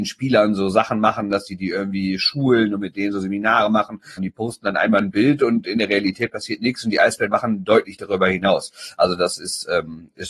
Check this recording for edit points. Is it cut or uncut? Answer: cut